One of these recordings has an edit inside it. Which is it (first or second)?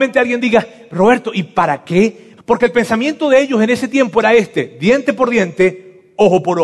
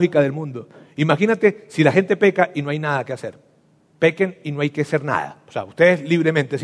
first